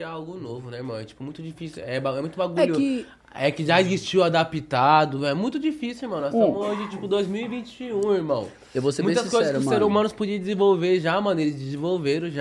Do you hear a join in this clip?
no; 0 cuts

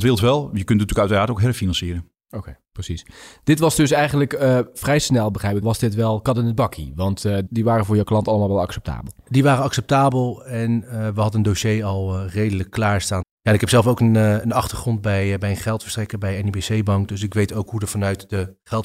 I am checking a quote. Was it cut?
yes; 3 cuts; at 5.6 s, 7.5 s, 13.2 s

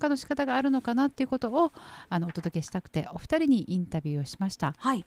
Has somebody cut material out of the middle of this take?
no; 0 cuts

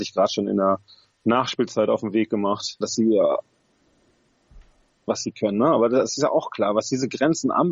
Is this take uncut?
no; 2 cuts; at 2.8 s, 5.1 s

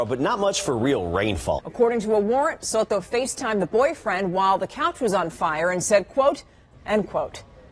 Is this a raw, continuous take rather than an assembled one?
no; 2 cuts; at 1.6 s, 6.7 s

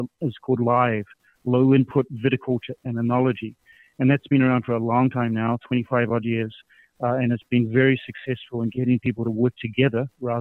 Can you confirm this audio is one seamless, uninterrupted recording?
yes; 0 cuts

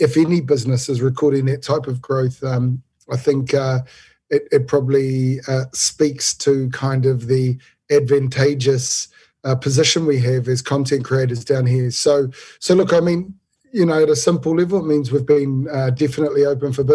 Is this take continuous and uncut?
yes; 0 cuts

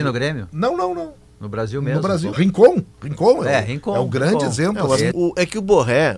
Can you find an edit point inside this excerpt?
yes; 2 cuts; at 2.3 s, 5.1 s

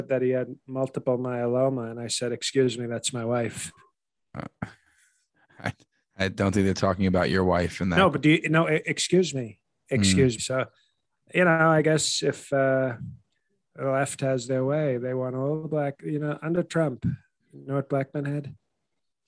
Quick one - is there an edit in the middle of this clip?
yes; 1 cut; at 10.4 s

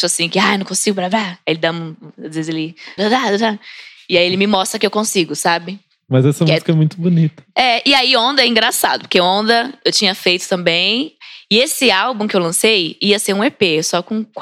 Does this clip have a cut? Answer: yes; 1 cut; at 3.0 s

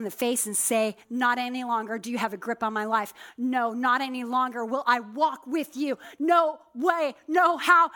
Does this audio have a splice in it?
yes; 1 cut; at 1.0 s

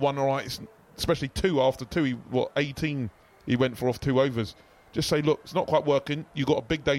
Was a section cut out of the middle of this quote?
no; 0 cuts

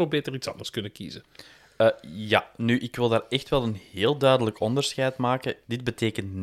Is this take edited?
no; 0 cuts

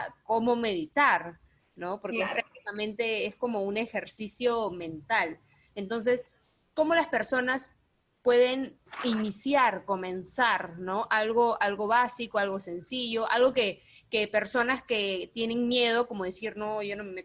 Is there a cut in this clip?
no; 0 cuts

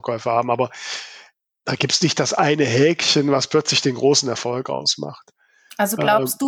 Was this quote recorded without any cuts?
yes; 0 cuts

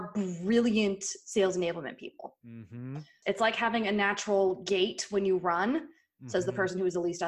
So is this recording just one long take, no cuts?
no; 1 cut; at 3.2 s

